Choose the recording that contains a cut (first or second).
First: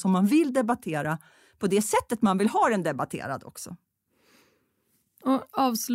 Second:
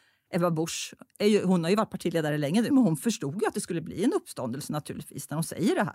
second